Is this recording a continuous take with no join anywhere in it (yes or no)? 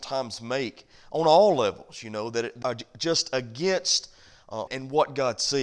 no